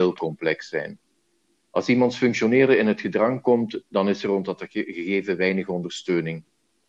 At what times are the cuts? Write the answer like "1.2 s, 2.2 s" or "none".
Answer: none